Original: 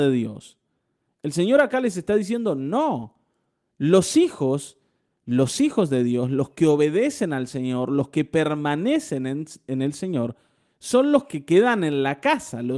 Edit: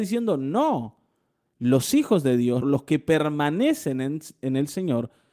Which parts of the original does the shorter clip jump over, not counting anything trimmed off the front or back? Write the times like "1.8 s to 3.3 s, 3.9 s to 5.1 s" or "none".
3.6 s to 5.1 s, 6.3 s to 7.9 s